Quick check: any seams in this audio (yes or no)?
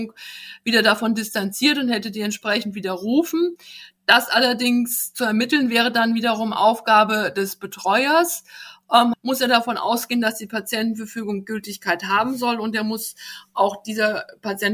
yes